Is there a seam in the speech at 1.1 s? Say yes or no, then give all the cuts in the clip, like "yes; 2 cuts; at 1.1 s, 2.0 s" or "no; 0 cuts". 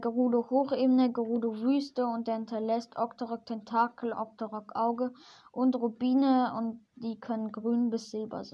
no; 1 cut; at 4.1 s